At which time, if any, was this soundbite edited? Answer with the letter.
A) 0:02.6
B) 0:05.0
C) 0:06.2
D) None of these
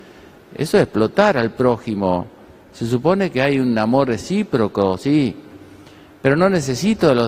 B